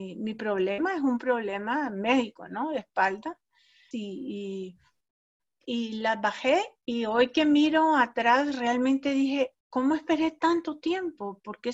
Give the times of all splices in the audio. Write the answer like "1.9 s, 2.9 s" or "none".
3.9 s, 6.8 s, 9.6 s